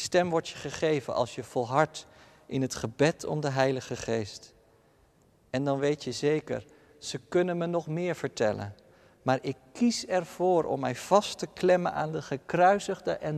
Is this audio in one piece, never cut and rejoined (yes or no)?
yes